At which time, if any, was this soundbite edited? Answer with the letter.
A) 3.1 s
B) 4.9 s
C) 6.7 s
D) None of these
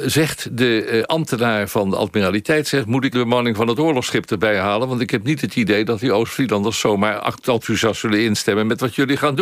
A